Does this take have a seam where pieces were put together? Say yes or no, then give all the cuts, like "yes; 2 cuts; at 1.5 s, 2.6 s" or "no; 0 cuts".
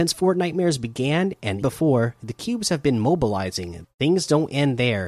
yes; 2 cuts; at 1.6 s, 3.8 s